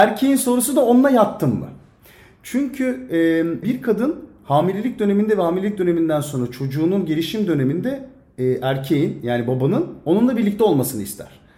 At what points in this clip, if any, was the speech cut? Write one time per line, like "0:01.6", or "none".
0:03.6